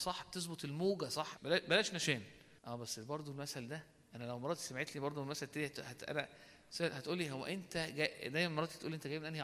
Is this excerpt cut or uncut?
cut